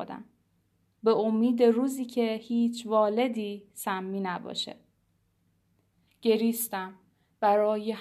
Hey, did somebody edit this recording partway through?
yes; 1 cut; at 6.1 s

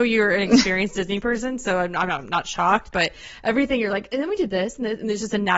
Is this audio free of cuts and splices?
yes; 0 cuts

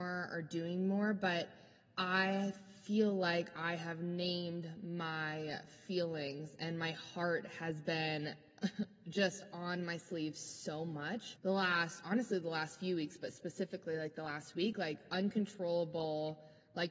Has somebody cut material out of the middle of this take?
yes; 1 cut; at 11.4 s

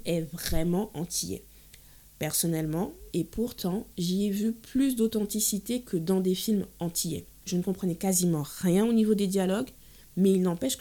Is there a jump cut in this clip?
yes; 2 cuts; at 3.1 s, 7.4 s

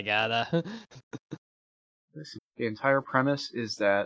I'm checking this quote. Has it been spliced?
yes; 1 cut; at 2.4 s

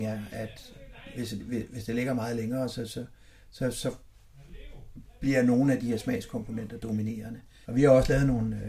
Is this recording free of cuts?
no; 1 cut; at 7.6 s

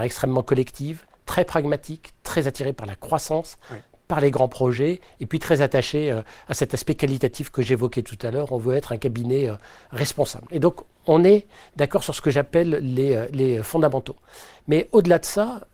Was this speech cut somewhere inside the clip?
no; 0 cuts

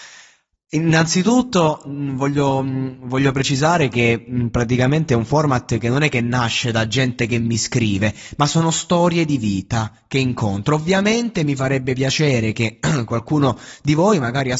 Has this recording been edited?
no; 0 cuts

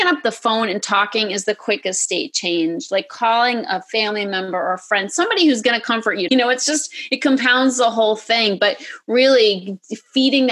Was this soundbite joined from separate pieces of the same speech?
yes; 1 cut; at 6.3 s

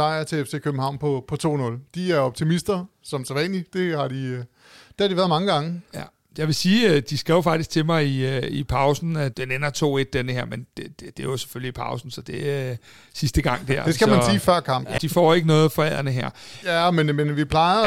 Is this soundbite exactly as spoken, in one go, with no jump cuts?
no; 3 cuts; at 9.3 s, 15.0 s, 16.6 s

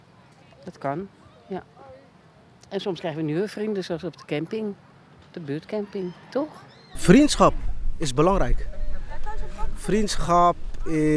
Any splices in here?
no; 0 cuts

